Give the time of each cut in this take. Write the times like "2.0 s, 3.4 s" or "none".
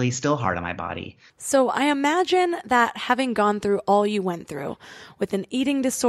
1.3 s